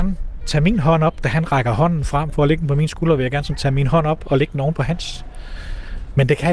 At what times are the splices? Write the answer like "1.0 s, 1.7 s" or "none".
none